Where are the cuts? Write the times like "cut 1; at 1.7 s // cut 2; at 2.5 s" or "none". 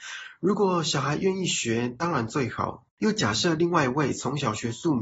cut 1; at 2.9 s

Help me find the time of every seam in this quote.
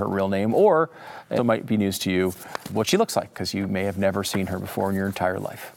cut 1; at 1.4 s // cut 2; at 2.7 s

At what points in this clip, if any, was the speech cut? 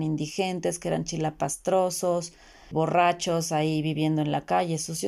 cut 1; at 2.7 s

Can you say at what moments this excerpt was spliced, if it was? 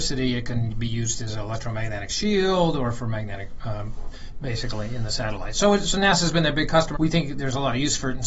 cut 1; at 4.1 s // cut 2; at 6.9 s

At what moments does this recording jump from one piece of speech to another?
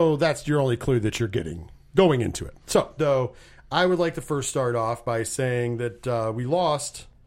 cut 1; at 3.0 s

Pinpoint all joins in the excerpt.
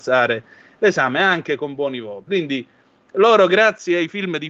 cut 1; at 2.3 s

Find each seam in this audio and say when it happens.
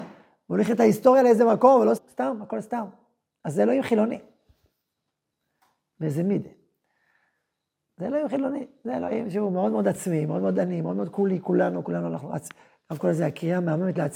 cut 1; at 2.0 s

